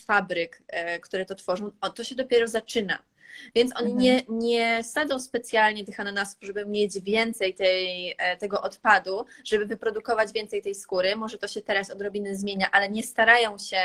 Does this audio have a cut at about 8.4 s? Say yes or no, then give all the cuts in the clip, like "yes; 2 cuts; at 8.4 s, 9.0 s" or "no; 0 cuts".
no; 2 cuts; at 1.0 s, 3.5 s